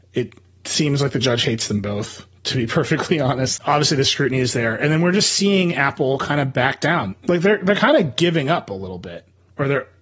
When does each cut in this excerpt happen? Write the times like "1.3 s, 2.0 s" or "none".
3.6 s, 7.1 s